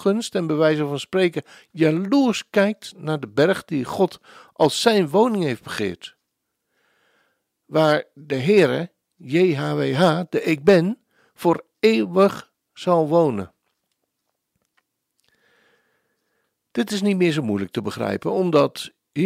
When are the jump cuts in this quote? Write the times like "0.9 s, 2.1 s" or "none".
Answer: none